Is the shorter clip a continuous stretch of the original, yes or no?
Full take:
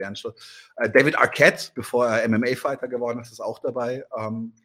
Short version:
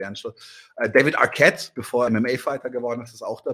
no